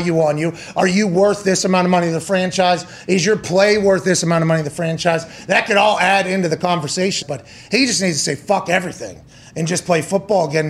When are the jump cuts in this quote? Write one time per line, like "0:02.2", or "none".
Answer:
0:07.2